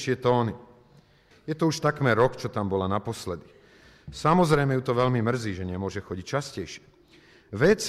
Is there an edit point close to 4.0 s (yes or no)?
no